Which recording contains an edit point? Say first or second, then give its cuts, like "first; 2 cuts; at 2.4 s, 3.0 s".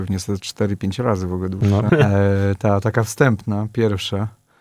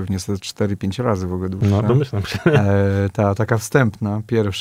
first; 1 cut; at 1.9 s